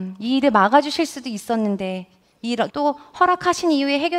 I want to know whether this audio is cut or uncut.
cut